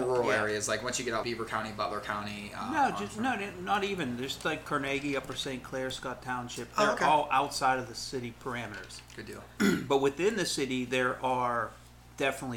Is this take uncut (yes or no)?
no